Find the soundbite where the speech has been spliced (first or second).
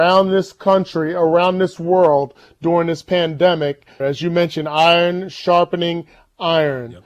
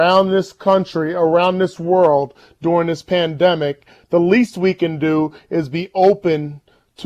first